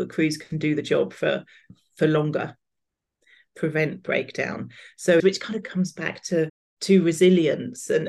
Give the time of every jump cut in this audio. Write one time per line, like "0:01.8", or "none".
0:05.2